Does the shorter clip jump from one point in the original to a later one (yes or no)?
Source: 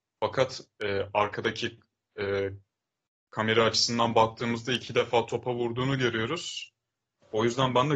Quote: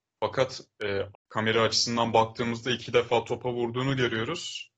yes